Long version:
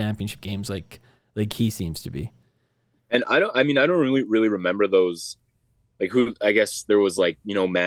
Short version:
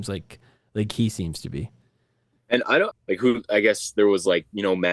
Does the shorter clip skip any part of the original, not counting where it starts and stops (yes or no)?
yes